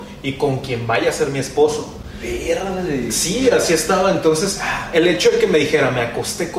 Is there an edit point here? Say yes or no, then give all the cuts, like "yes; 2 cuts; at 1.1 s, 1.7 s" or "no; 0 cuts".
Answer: no; 0 cuts